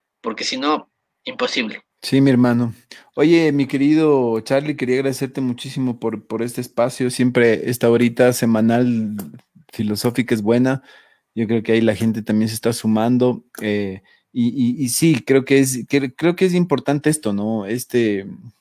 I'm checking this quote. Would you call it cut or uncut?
cut